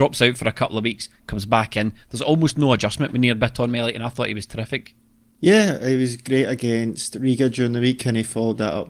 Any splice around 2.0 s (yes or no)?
no